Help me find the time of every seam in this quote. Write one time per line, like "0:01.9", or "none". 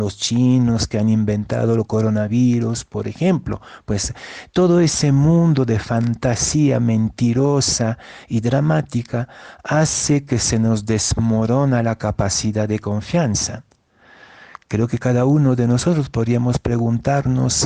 none

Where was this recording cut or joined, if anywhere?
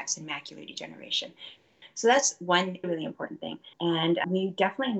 0:03.7

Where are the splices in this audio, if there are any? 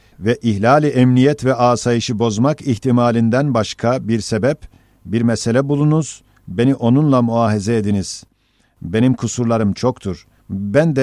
none

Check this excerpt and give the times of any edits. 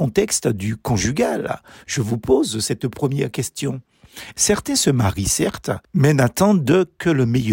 0:04.3

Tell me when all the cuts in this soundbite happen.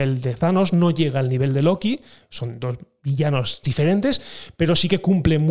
0:03.6

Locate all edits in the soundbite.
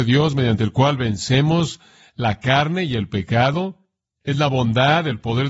none

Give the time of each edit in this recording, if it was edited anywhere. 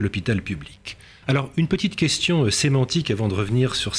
0:01.2

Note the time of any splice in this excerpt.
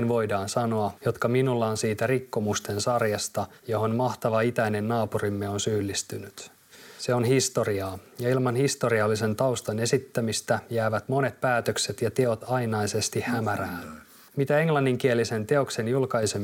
0:01.0
0:14.3

